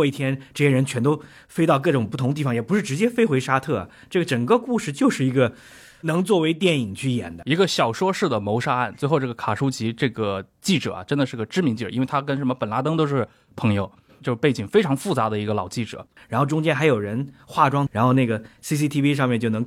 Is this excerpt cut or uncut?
cut